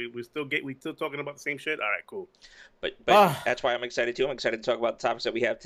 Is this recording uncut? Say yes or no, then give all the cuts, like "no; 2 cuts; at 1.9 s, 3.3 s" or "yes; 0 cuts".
yes; 0 cuts